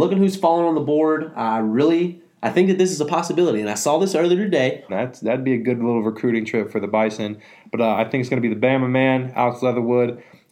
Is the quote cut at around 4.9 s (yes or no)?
yes